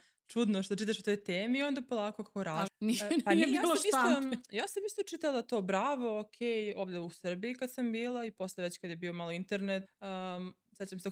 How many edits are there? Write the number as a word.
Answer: two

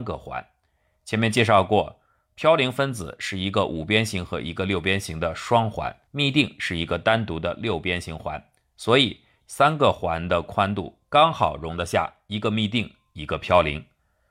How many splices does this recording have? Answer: one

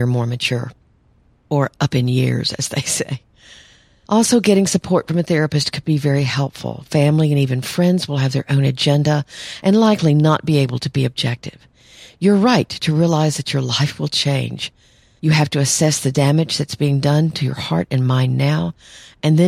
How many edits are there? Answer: zero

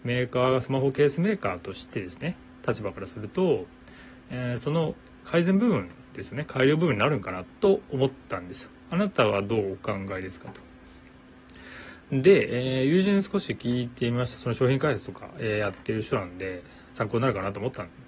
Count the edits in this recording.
two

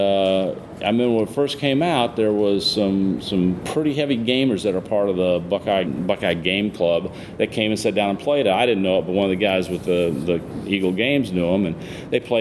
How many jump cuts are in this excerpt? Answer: one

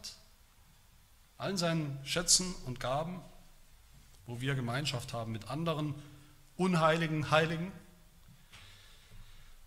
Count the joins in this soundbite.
one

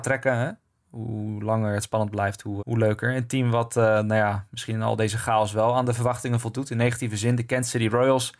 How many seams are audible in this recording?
one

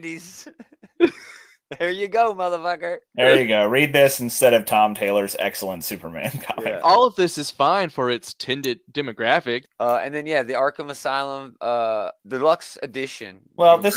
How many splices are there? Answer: three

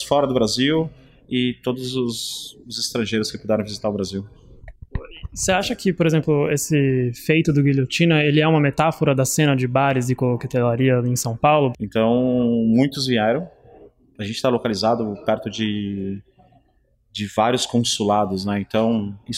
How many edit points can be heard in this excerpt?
one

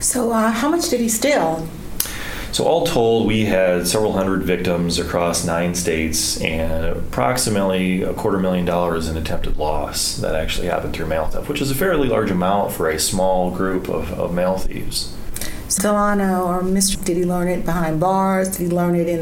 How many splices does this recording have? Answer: two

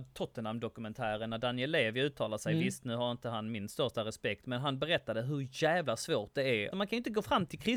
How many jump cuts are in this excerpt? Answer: one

